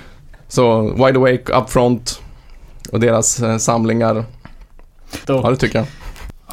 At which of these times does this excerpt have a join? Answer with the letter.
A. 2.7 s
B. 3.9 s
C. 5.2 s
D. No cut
C